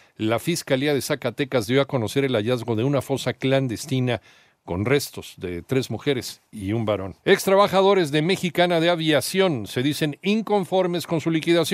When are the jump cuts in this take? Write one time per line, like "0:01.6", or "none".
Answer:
0:07.2